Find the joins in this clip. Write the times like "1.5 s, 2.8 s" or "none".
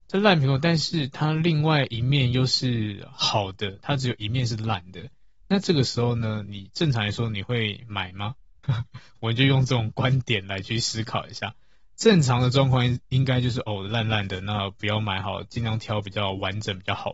8.6 s